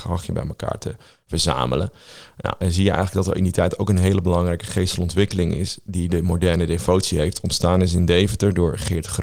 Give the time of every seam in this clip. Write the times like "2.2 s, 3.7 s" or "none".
2.6 s